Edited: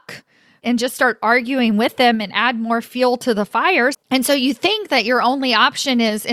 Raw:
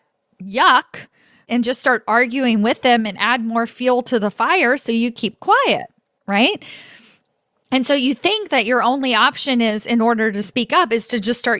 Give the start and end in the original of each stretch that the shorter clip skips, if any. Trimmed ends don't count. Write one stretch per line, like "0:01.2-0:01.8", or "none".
0:04.8-0:07.6